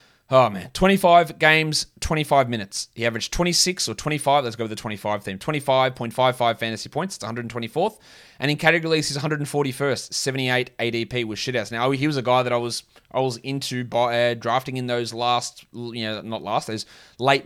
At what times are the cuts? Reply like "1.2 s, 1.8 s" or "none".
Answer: none